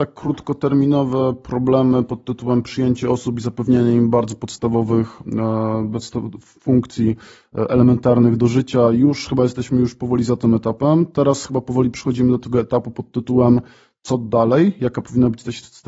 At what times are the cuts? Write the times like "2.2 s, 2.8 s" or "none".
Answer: none